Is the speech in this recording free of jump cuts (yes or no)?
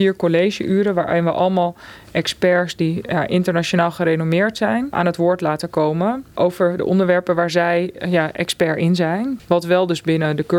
no